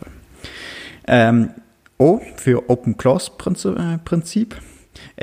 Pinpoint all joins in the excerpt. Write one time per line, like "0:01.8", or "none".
none